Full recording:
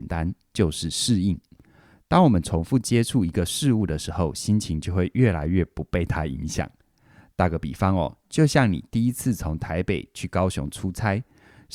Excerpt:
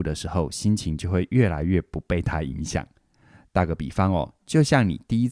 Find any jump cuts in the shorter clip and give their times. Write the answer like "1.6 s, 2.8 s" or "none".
none